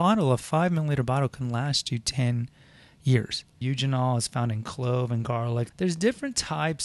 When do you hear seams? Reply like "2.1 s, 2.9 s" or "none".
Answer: 3.6 s, 5.7 s